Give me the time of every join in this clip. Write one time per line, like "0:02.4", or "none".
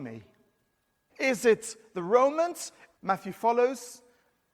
0:01.1
0:03.0